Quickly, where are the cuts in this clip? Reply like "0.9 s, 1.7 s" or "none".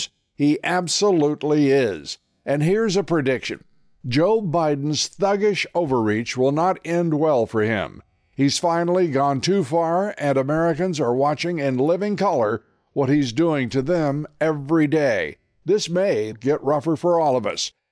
16.3 s